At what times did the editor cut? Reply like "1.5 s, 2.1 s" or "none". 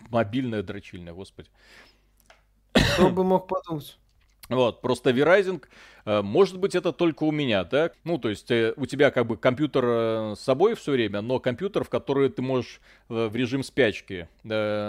7.9 s